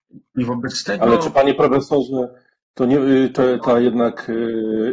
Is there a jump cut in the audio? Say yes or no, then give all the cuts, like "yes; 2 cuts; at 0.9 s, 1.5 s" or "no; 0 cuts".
yes; 1 cut; at 3.6 s